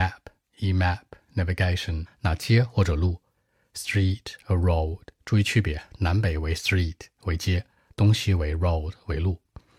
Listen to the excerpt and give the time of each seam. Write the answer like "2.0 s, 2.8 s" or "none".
2.1 s